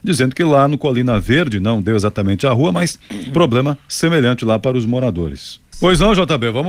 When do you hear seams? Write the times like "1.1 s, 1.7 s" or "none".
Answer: 5.7 s